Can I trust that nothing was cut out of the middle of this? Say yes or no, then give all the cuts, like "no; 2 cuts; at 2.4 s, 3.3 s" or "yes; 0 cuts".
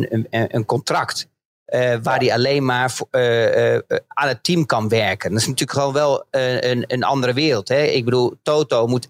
yes; 0 cuts